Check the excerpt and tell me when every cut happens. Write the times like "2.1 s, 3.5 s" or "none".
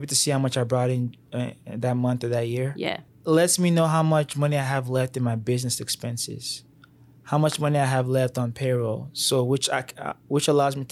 3.1 s